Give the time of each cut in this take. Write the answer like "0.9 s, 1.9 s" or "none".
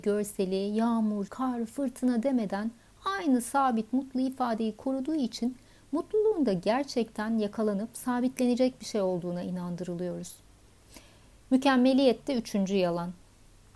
1.3 s

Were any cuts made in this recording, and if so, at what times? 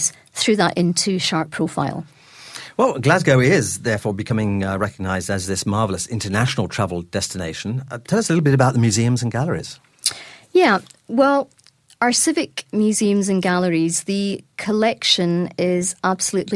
none

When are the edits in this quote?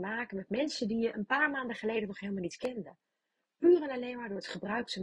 none

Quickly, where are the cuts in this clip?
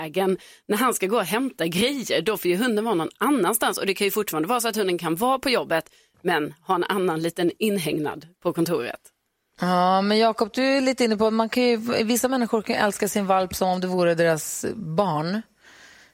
none

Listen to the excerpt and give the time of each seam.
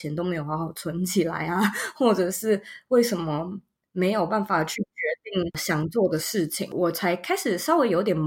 none

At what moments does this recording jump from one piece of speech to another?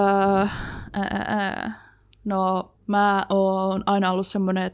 2.8 s

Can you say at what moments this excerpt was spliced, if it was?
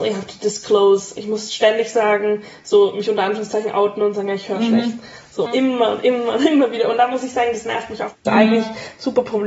5.5 s, 8.3 s

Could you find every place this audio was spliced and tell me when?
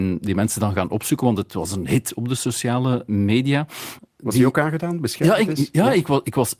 4.0 s

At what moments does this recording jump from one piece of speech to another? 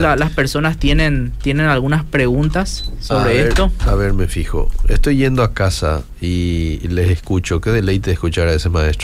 none

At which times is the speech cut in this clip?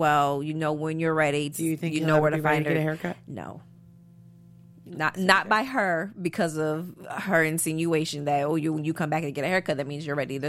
1.5 s

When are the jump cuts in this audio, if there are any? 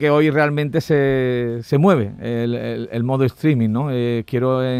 none

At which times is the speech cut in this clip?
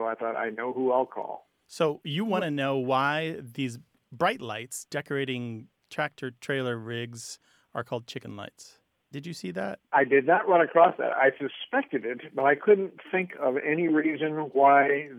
9.1 s

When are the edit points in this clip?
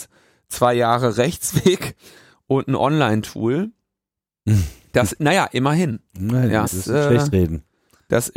6.7 s

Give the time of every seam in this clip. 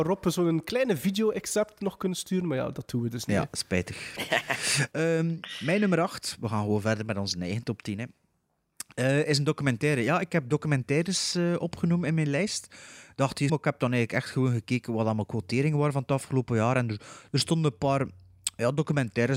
13.5 s

